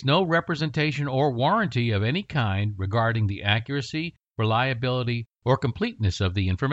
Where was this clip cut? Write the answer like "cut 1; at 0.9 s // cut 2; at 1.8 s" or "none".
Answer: none